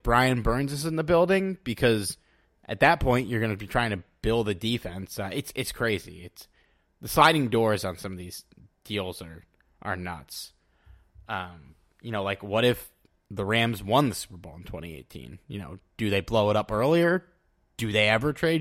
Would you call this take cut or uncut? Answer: uncut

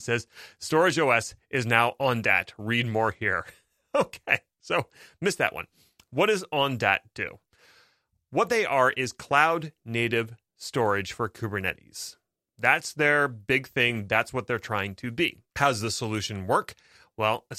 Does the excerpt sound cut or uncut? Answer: cut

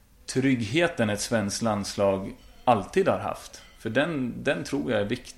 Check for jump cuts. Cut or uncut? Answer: uncut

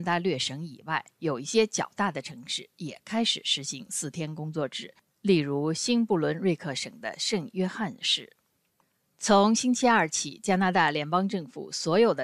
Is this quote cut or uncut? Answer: uncut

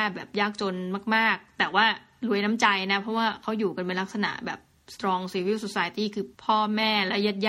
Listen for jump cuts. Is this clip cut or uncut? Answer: cut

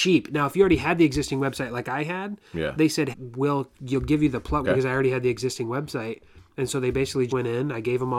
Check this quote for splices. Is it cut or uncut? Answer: cut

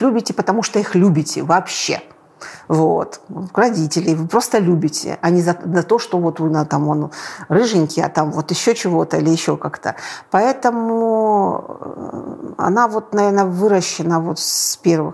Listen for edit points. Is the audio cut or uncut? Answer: uncut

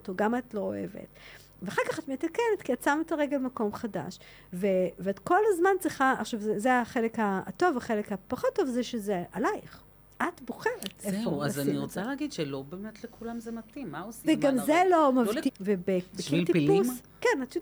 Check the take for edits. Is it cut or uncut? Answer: cut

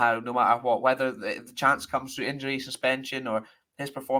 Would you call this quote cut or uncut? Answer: uncut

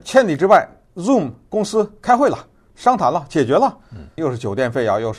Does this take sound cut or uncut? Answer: cut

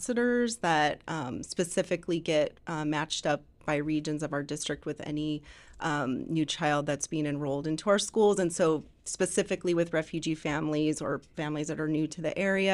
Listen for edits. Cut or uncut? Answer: uncut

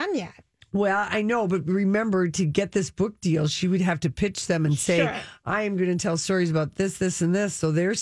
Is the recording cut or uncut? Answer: uncut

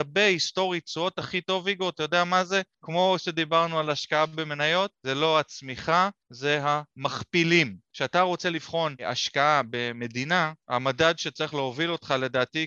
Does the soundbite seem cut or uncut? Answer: uncut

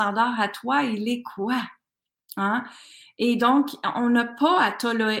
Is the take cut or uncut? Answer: uncut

